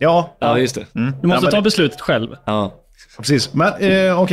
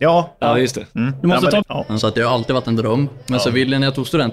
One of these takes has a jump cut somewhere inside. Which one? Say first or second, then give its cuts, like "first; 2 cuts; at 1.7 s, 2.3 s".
second; 1 cut; at 1.6 s